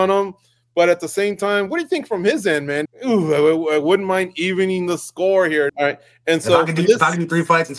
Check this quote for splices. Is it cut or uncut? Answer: cut